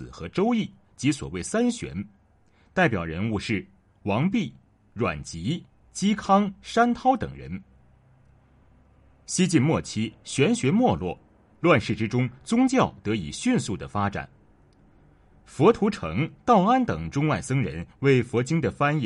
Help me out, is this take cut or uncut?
uncut